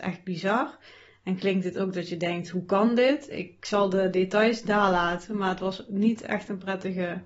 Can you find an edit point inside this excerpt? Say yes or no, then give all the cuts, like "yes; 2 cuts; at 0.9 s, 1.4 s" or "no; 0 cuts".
no; 0 cuts